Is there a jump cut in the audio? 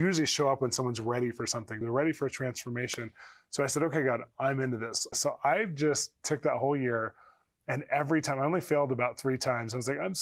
yes; 2 cuts; at 1.8 s, 5.1 s

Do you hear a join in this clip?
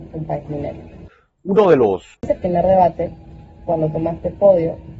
yes; 1 cut; at 2.1 s

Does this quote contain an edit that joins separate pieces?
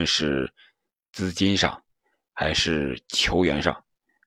no; 0 cuts

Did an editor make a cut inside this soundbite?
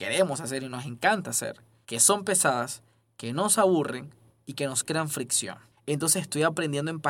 yes; 2 cuts; at 1.8 s, 5.7 s

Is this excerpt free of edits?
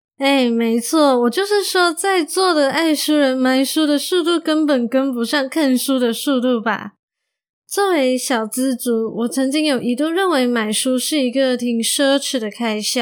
yes; 0 cuts

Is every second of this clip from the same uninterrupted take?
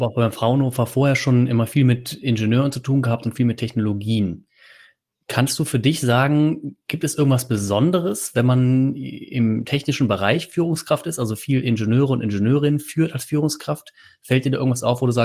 yes; 0 cuts

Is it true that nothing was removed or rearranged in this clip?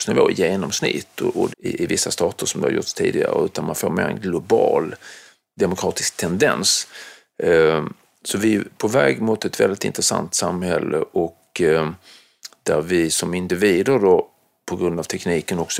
no; 1 cut; at 1.5 s

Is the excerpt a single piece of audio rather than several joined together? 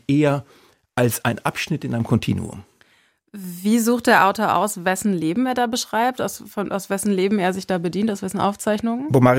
yes; 0 cuts

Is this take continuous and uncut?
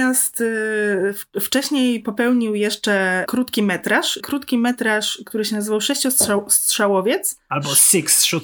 yes; 0 cuts

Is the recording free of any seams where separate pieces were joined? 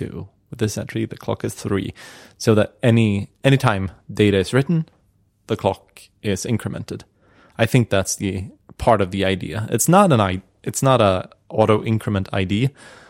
yes; 0 cuts

